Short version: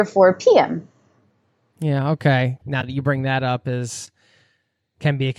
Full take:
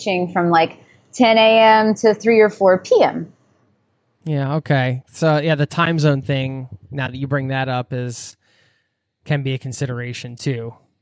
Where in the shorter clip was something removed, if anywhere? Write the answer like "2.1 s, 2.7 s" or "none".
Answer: 2.6 s